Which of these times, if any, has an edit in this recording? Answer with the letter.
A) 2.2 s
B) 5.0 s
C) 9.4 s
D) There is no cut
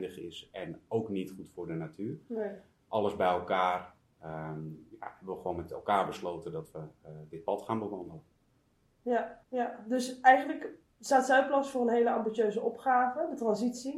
C